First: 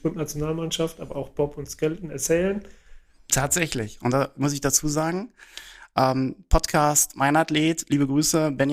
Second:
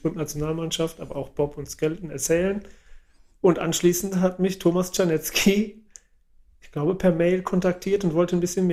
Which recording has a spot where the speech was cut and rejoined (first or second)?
first